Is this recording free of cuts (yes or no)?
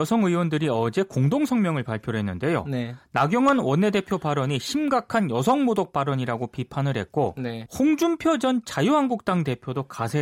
no